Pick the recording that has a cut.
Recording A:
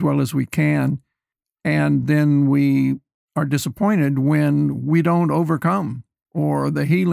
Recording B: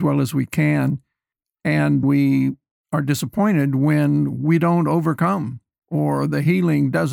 B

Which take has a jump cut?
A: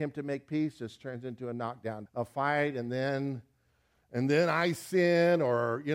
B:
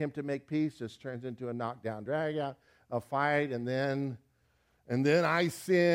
A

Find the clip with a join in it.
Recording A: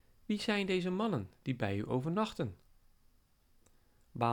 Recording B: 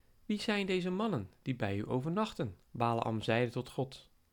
B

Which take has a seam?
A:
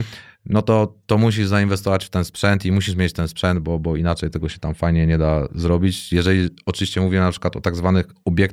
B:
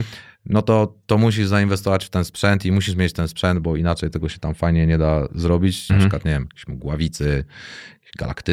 B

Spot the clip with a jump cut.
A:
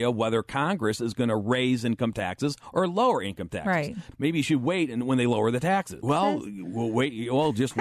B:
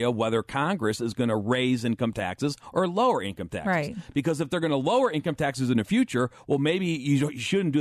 A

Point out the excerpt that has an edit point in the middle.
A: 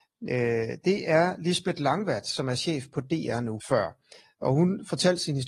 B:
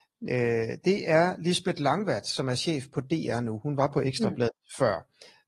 A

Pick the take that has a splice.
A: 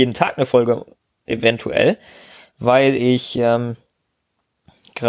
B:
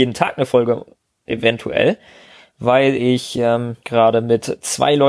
B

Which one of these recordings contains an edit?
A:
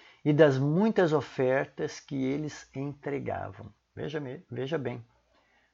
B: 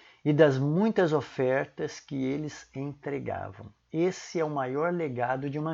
A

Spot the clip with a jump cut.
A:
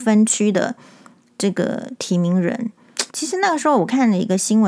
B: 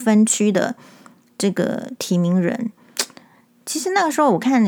A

